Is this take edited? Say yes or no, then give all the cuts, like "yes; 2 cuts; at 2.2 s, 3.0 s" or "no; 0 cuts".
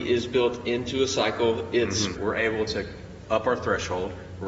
yes; 1 cut; at 2.1 s